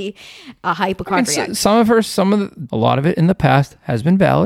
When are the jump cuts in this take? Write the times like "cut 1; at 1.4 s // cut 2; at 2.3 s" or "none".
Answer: cut 1; at 2.7 s